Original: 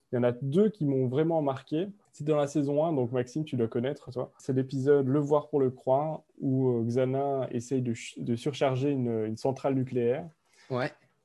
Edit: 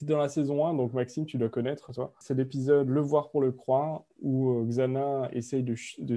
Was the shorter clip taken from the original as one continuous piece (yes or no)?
yes